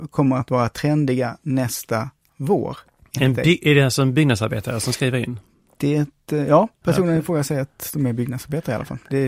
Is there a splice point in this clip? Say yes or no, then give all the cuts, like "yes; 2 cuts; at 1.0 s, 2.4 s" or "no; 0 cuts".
no; 0 cuts